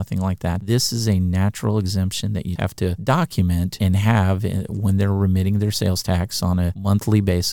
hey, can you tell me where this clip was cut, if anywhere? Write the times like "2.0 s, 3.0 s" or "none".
2.6 s